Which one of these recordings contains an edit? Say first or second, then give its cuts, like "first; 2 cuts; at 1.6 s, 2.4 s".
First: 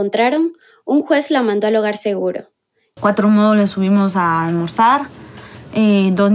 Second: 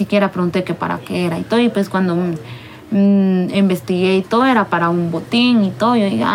first; 1 cut; at 3.0 s